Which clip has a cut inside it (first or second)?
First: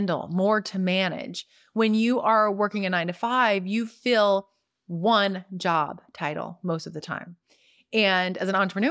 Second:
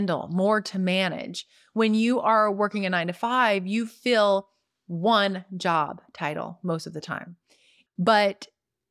second